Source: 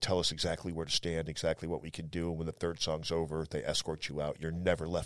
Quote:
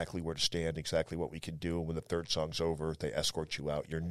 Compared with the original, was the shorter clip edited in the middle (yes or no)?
no